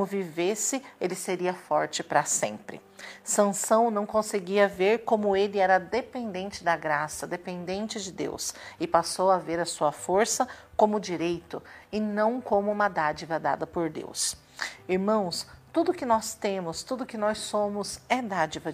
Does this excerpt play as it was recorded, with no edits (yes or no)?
yes